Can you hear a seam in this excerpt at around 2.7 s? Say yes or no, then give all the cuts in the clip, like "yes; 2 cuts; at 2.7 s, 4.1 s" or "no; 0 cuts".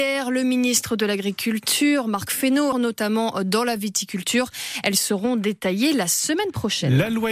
yes; 1 cut; at 2.7 s